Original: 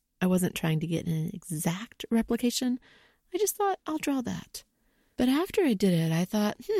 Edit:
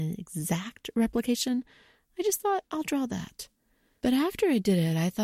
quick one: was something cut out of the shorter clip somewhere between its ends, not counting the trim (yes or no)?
no